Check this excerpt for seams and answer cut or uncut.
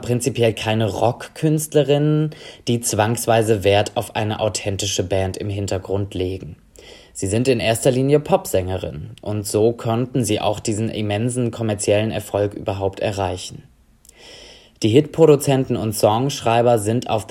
uncut